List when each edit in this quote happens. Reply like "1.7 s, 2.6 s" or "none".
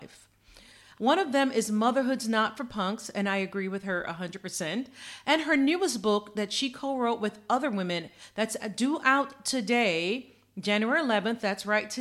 0.9 s